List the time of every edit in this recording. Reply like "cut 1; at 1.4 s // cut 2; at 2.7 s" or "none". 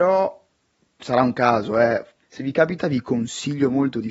cut 1; at 2.2 s